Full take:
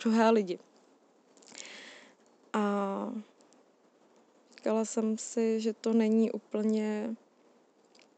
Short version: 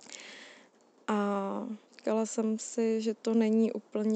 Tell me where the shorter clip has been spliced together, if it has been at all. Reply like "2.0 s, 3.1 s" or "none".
1.8 s